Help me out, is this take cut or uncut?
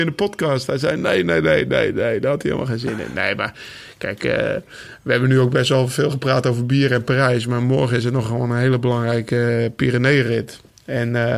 uncut